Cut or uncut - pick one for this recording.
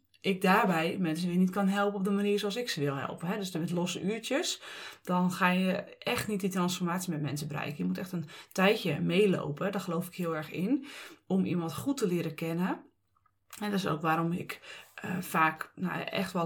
uncut